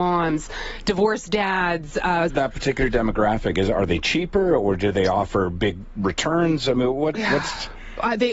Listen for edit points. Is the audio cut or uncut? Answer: cut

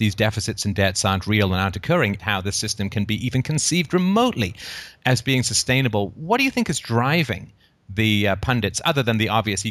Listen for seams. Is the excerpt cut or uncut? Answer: cut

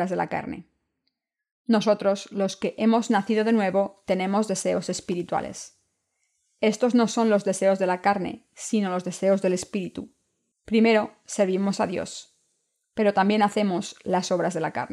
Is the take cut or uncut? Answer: cut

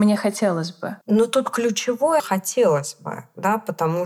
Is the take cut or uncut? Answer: cut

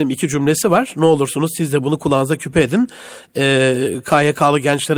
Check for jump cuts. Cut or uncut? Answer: uncut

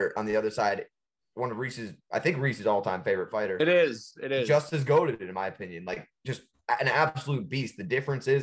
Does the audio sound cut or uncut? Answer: uncut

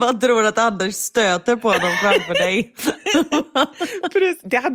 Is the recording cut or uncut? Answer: uncut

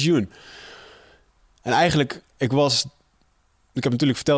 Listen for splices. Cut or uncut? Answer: uncut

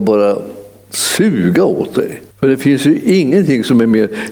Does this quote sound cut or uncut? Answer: cut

